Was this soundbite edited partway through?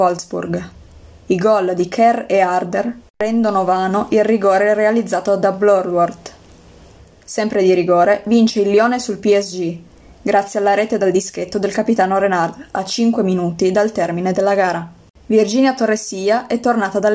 no; 0 cuts

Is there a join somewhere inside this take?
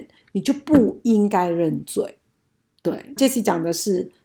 yes; 1 cut; at 3.2 s

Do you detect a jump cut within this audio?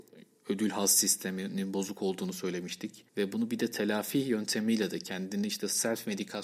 yes; 1 cut; at 3.1 s

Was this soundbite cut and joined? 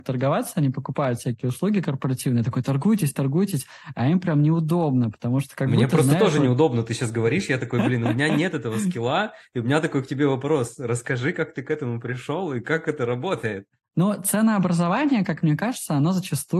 no; 0 cuts

